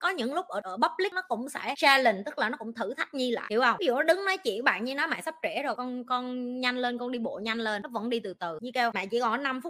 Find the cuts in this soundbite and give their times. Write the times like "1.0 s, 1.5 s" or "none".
5.8 s